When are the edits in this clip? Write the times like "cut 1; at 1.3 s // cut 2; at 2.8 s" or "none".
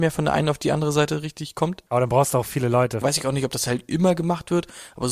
cut 1; at 1.9 s // cut 2; at 3.0 s

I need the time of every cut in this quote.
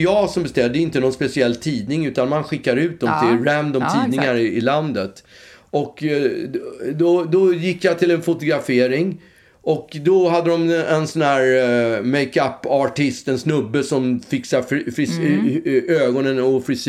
none

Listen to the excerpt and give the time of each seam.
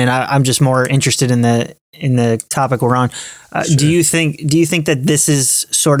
none

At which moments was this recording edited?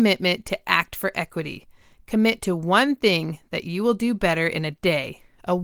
none

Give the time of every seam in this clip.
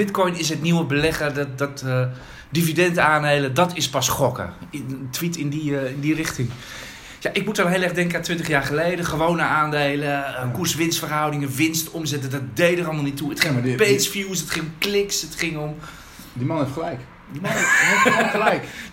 none

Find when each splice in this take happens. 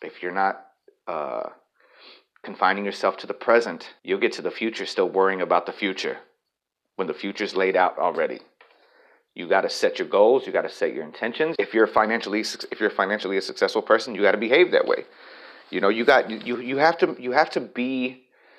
cut 1; at 4.0 s // cut 2; at 11.5 s

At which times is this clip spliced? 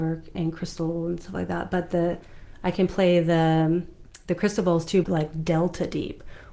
cut 1; at 5.0 s

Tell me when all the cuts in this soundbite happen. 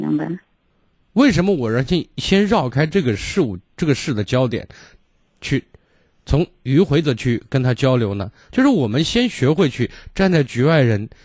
none

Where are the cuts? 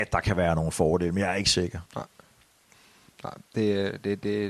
cut 1; at 1.9 s

